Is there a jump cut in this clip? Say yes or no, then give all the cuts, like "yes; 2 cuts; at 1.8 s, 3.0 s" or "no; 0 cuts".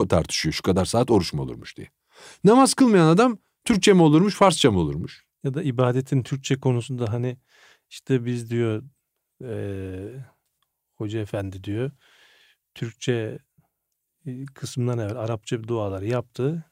no; 0 cuts